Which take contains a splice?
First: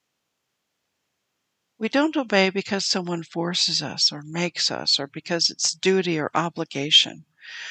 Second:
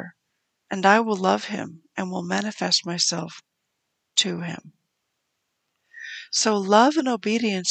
first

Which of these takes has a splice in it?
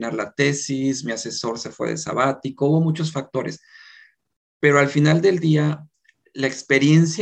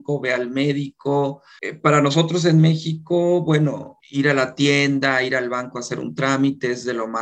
second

